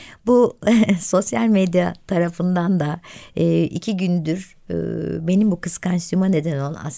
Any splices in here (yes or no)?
no